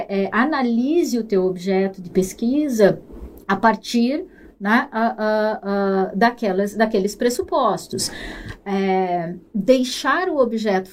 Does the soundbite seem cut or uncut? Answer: uncut